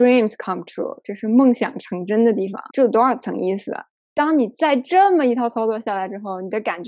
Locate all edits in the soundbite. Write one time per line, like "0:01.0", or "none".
0:02.7
0:04.0